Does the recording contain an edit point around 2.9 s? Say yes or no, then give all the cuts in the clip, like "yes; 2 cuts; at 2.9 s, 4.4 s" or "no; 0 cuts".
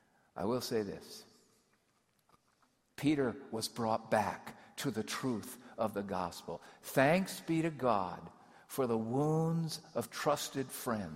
yes; 1 cut; at 2.9 s